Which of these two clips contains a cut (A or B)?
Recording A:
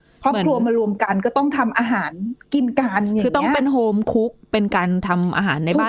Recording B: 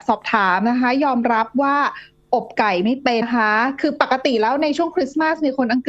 B